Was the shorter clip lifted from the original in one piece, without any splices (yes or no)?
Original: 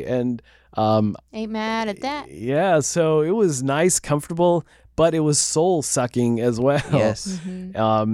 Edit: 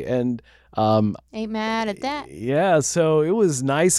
yes